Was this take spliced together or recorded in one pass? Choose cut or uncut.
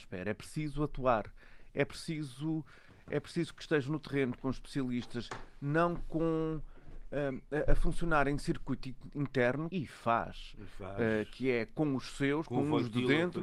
cut